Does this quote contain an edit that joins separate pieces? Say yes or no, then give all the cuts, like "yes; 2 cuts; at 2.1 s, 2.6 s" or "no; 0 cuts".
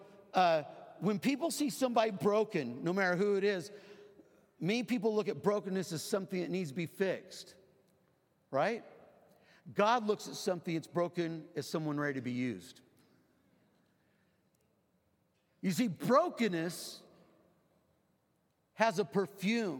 no; 0 cuts